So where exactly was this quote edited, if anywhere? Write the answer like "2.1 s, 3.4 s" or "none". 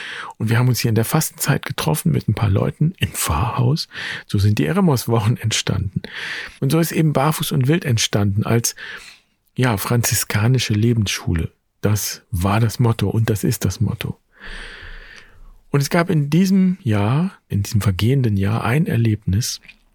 6.6 s, 17.5 s

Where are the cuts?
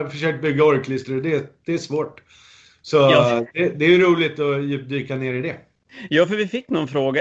none

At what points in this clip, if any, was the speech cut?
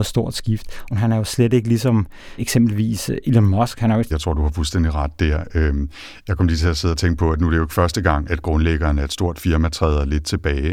0.9 s, 4.1 s, 8.3 s

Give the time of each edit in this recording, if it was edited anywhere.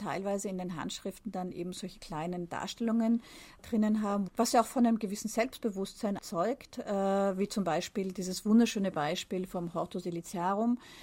4.3 s, 6.2 s

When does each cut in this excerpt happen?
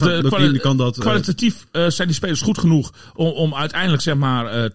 none

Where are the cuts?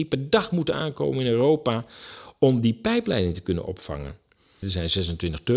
4.6 s

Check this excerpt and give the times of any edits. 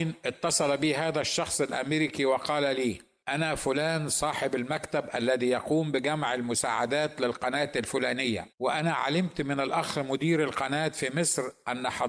8.5 s

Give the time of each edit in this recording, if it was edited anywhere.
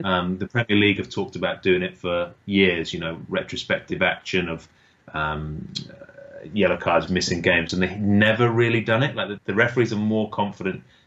7.1 s, 9.4 s

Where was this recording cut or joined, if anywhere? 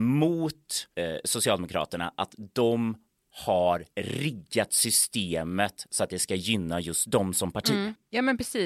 none

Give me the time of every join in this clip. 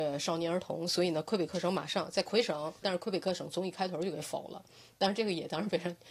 2.8 s

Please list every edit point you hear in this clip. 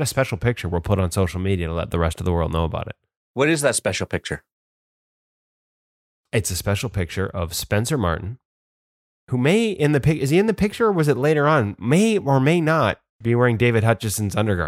13.1 s

